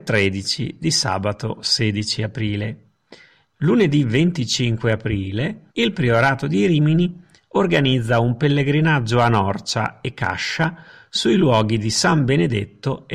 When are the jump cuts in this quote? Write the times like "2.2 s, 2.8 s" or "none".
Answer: 3.5 s, 5.7 s